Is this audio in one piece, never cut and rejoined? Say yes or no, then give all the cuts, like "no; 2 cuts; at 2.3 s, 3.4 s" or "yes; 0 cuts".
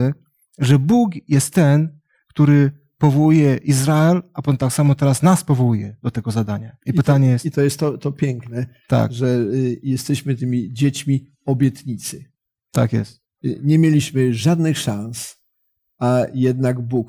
yes; 0 cuts